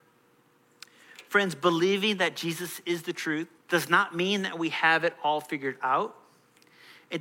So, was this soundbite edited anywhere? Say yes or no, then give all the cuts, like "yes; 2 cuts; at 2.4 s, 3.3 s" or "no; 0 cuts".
yes; 1 cut; at 3.6 s